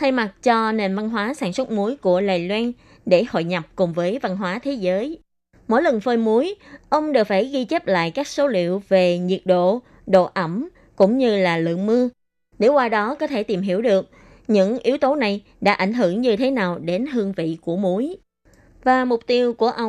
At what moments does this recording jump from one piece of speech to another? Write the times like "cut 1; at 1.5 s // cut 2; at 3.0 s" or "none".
cut 1; at 5.5 s